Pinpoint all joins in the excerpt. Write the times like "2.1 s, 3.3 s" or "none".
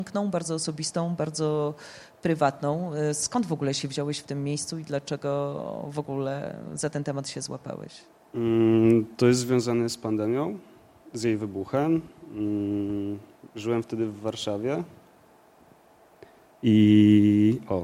none